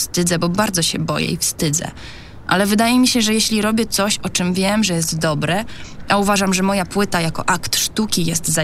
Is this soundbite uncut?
yes; 0 cuts

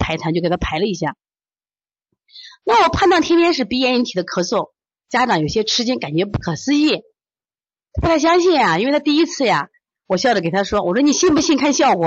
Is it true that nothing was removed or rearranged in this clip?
yes; 0 cuts

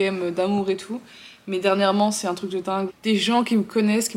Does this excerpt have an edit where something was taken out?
yes; 1 cut; at 2.9 s

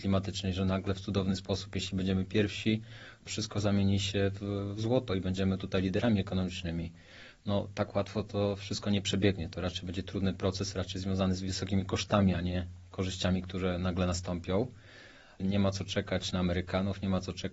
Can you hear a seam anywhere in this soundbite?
yes; 2 cuts; at 3.3 s, 15.4 s

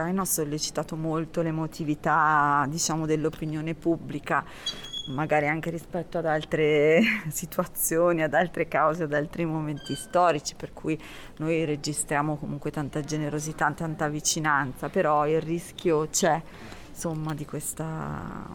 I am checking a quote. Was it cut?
no; 0 cuts

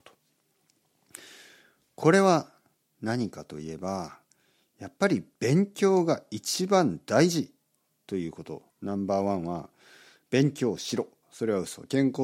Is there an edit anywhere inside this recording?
yes; 2 cuts; at 8.7 s, 11.2 s

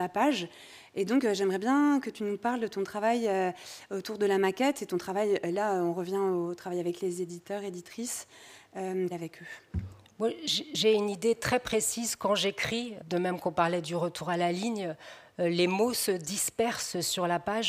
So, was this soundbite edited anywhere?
yes; 2 cuts; at 9.1 s, 13.0 s

